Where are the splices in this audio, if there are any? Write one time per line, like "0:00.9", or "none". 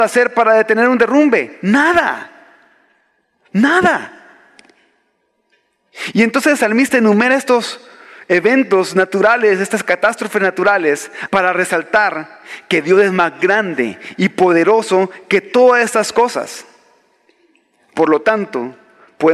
0:11.3